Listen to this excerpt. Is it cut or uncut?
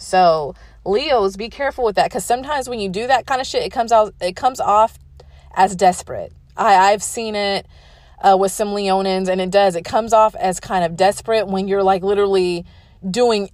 uncut